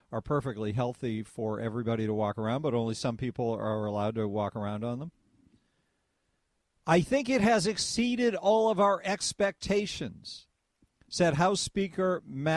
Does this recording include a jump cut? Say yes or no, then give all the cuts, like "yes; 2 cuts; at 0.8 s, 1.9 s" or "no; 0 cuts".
no; 0 cuts